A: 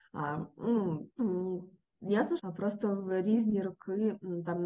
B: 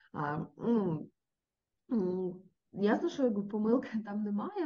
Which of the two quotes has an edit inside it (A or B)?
A